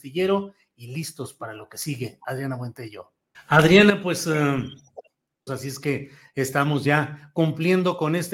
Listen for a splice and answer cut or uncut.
cut